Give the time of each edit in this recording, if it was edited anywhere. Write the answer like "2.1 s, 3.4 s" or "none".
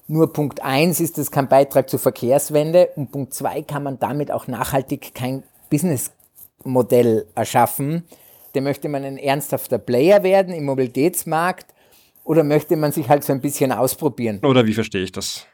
8.5 s, 14.4 s